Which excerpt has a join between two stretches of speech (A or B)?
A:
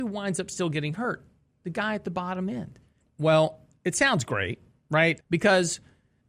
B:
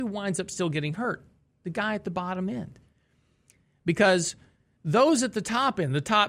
A